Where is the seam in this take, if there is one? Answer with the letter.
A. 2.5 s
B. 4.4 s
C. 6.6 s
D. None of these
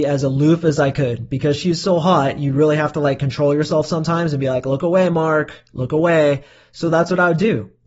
D